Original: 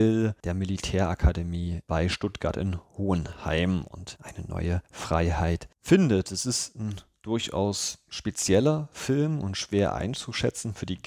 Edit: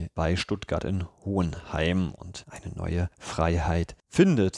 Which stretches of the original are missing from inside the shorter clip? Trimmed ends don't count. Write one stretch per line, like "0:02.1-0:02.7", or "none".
none